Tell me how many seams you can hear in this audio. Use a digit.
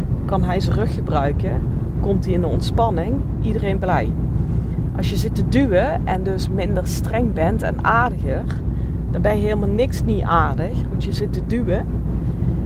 0